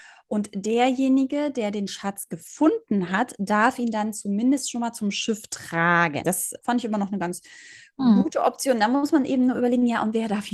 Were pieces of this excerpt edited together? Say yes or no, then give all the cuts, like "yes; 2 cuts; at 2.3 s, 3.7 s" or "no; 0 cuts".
yes; 1 cut; at 6.2 s